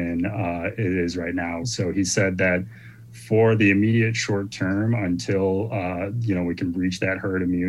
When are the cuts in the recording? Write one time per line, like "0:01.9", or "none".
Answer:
0:01.6